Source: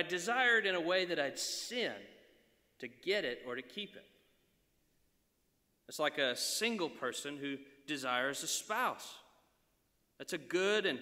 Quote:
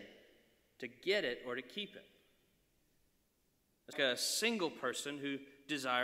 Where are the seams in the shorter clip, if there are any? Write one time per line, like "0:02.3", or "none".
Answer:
0:03.9